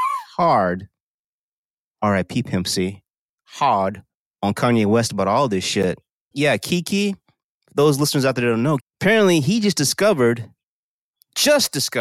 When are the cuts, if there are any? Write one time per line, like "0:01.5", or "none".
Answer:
0:06.3
0:08.8